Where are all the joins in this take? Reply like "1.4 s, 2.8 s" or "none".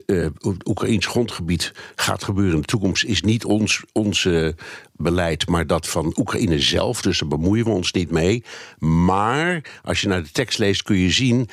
none